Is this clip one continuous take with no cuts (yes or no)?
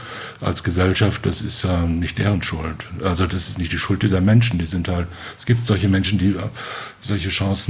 yes